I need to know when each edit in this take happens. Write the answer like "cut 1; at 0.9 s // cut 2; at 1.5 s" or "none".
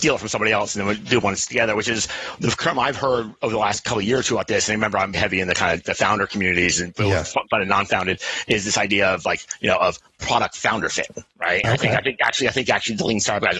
cut 1; at 5.1 s